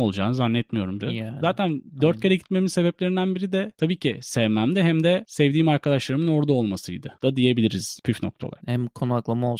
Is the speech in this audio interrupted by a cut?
yes; 2 cuts; at 1.0 s, 8.6 s

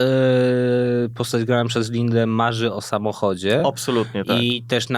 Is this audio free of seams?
yes; 0 cuts

